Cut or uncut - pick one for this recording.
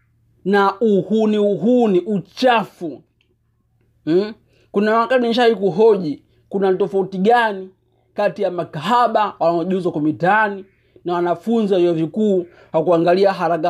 uncut